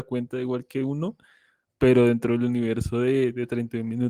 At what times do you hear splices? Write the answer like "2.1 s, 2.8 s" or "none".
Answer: none